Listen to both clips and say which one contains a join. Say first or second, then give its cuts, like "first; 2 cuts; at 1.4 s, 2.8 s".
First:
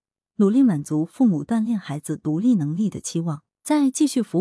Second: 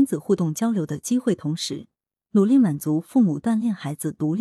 first; 1 cut; at 3.5 s